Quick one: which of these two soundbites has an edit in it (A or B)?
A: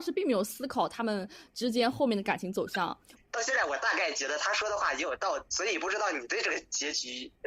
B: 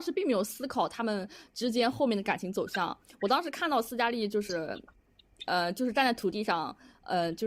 A